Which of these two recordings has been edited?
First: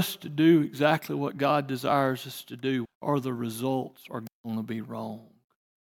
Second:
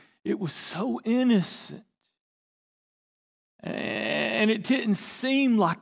first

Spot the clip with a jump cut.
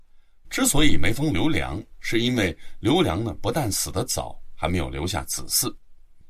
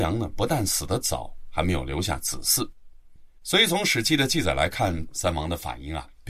second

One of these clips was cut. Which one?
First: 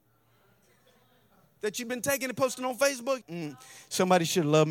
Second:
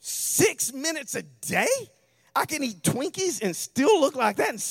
first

